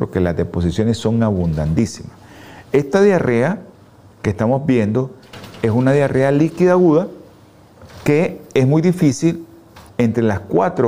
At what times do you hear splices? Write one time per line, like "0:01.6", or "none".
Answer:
0:09.9